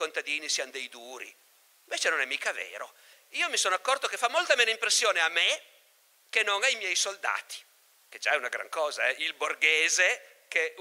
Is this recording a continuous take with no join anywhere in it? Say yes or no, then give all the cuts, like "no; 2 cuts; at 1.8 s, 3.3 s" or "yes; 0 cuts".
no; 1 cut; at 3.1 s